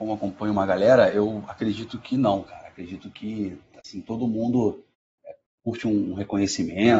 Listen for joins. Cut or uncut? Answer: uncut